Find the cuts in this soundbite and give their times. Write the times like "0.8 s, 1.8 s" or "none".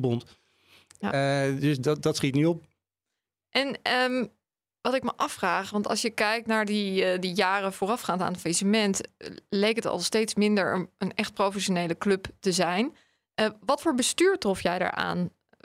none